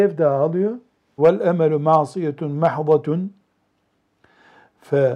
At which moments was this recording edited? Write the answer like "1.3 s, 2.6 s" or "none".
1.2 s